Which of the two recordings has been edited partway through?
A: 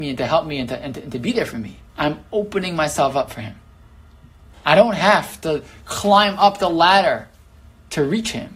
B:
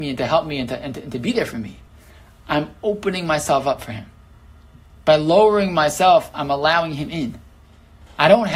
A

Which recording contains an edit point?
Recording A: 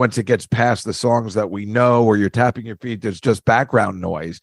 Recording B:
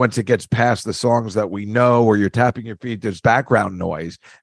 B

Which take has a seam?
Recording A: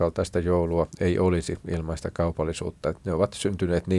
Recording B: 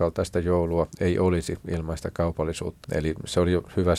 B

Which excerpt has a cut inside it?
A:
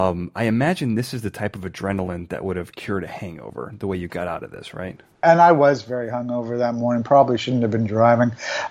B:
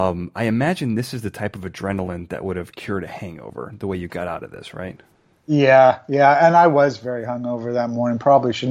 A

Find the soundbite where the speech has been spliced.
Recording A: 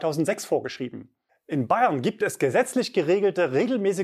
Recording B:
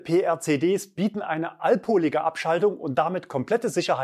A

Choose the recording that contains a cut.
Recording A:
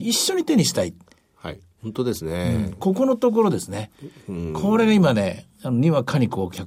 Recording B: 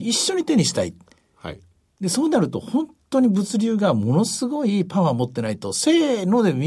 A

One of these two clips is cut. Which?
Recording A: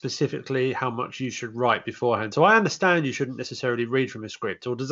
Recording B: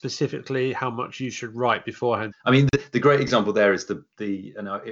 B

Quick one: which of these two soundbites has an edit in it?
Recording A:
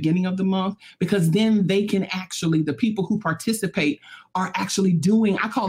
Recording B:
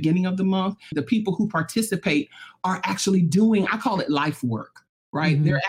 B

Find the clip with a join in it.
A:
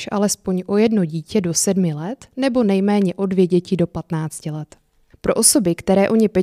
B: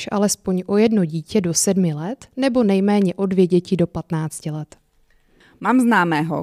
A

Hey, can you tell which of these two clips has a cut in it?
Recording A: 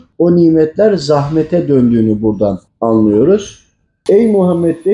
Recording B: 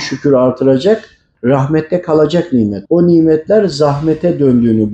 B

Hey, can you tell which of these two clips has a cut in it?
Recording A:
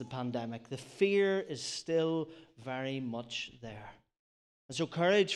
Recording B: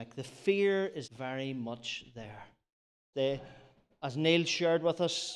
B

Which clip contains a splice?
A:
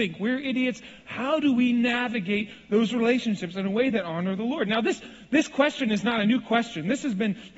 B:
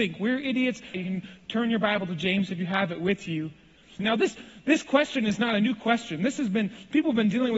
B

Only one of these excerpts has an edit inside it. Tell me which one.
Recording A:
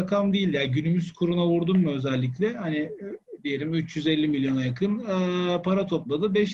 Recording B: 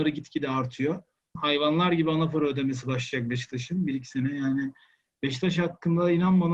B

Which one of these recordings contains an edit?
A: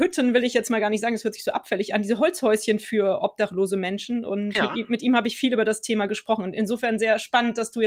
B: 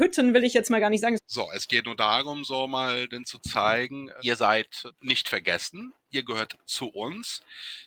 B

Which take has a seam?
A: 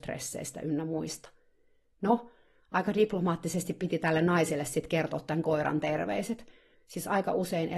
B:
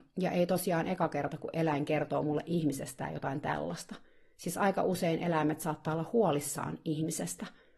A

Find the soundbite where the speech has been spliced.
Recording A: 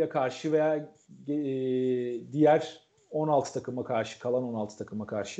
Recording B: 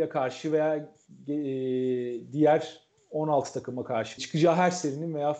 B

